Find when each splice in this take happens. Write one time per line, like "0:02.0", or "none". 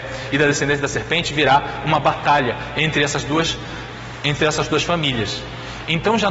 none